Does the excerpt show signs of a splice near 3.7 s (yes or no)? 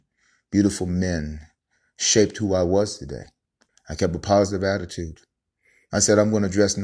yes